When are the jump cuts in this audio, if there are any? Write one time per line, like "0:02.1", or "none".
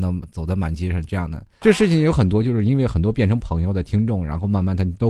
0:01.6